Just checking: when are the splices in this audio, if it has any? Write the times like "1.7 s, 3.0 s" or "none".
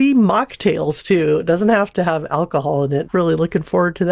3.0 s